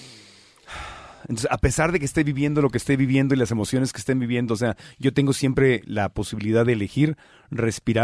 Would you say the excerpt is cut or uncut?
uncut